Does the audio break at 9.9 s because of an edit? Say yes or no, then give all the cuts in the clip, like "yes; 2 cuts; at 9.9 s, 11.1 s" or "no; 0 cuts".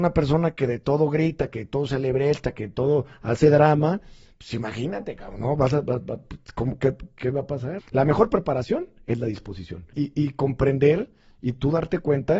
yes; 2 cuts; at 7.8 s, 9.9 s